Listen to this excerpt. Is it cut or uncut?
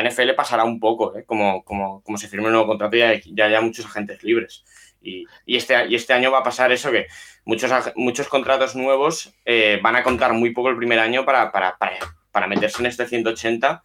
uncut